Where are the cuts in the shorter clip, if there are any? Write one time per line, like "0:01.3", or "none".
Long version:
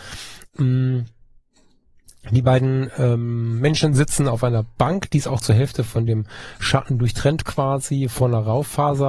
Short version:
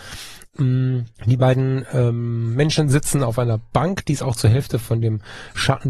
0:01.1